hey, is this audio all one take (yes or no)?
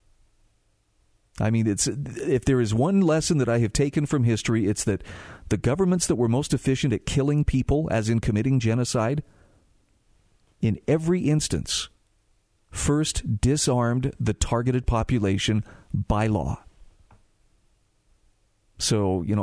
yes